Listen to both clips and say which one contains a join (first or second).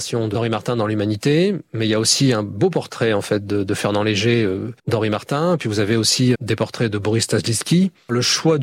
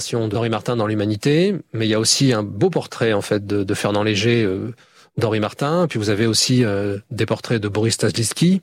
first